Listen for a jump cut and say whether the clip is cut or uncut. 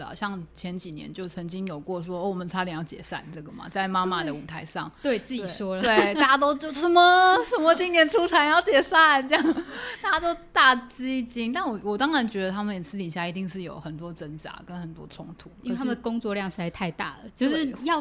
uncut